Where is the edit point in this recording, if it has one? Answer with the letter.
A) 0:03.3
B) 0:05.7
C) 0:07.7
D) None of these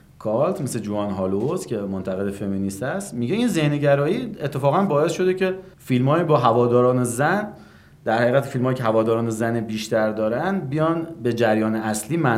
B